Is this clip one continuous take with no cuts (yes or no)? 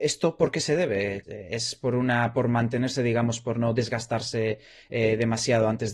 no